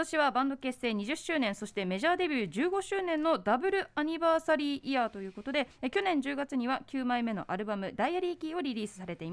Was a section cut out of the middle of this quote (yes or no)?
no